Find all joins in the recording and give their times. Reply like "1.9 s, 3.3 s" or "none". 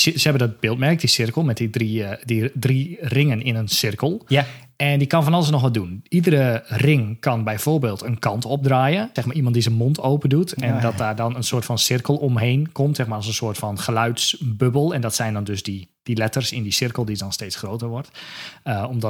9.2 s